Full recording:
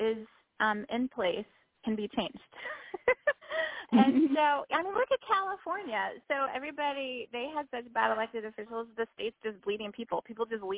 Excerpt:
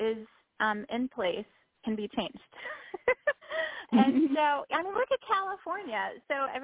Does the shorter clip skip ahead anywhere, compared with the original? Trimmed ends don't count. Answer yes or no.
no